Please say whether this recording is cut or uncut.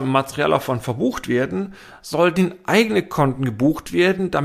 uncut